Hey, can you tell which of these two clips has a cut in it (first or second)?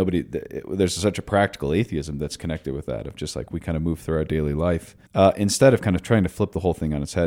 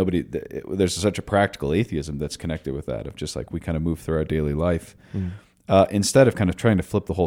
first